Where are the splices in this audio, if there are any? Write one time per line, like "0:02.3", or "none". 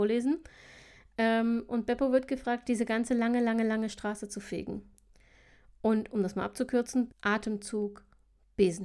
0:02.6
0:07.1

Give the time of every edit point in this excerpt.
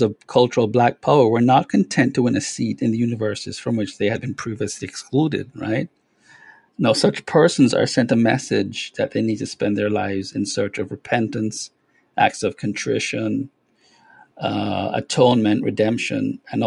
0:06.7

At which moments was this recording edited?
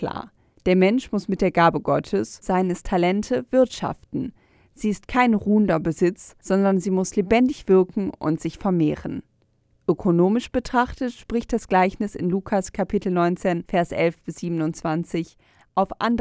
0:02.4

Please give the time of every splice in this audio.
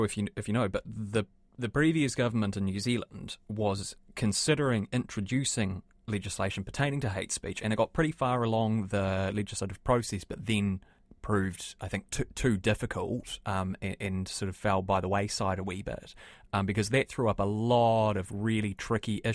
none

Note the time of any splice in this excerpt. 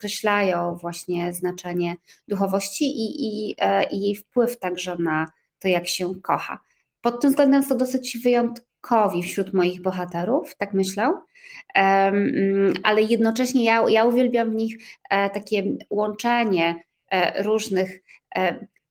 0:12.8

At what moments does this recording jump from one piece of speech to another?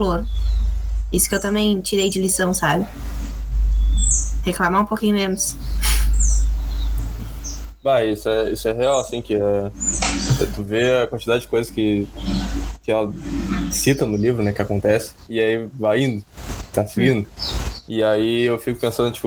none

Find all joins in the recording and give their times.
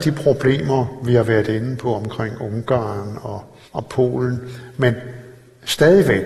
0:03.7

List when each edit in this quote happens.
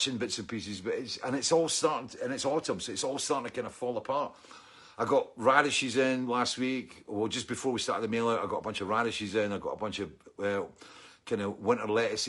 none

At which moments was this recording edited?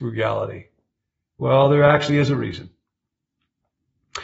none

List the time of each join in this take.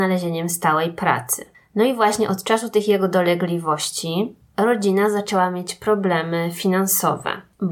none

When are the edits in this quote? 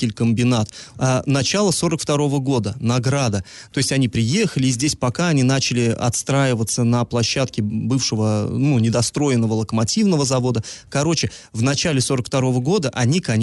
0:00.9
0:03.7

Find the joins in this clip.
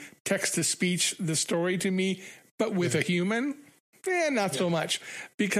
none

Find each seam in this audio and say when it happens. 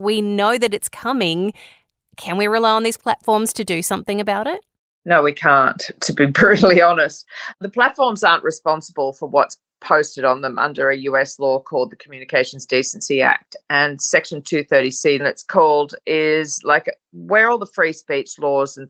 0:15.2

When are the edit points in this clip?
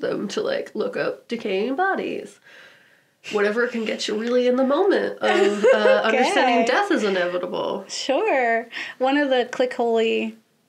none

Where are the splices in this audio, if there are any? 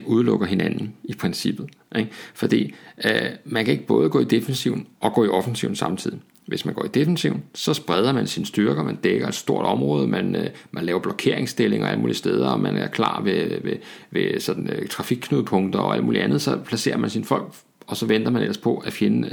none

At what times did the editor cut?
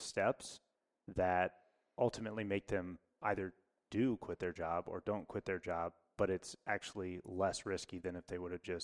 none

